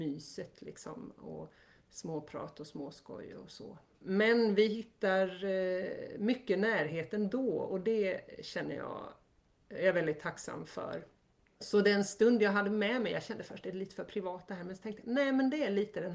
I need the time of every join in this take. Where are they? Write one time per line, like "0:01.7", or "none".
0:04.0